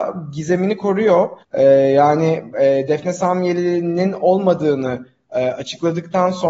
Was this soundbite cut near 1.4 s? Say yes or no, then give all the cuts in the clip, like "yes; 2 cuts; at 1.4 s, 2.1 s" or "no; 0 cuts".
yes; 1 cut; at 1.4 s